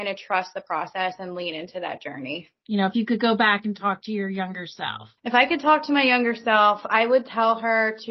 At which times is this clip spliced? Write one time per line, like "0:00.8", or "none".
0:02.6
0:05.2